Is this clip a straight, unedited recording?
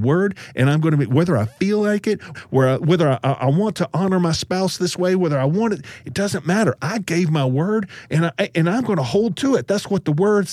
no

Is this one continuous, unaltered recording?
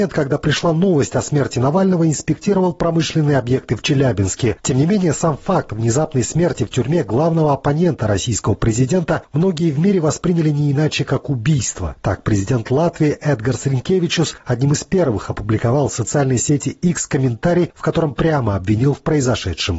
no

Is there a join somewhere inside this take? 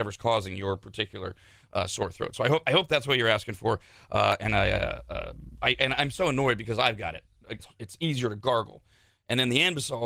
yes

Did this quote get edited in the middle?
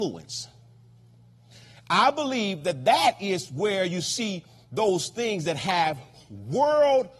no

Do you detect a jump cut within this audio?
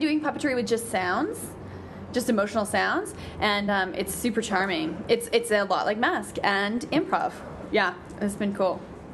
no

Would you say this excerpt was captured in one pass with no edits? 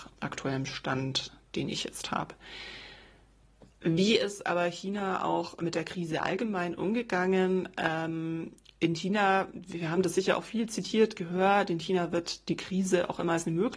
no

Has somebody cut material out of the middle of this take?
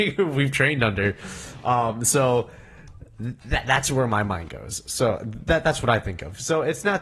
no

